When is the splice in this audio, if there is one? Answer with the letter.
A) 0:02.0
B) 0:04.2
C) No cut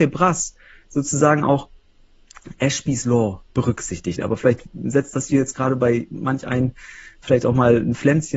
B